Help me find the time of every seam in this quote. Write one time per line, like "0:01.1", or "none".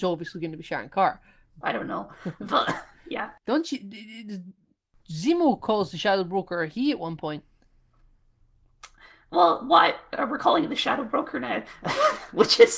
0:01.6